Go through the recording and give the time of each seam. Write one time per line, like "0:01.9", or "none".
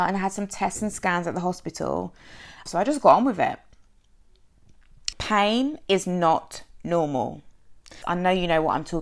0:02.7
0:05.1
0:08.0